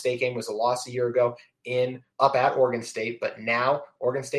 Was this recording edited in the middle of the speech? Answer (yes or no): yes